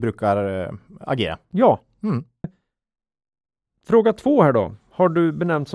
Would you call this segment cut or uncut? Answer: cut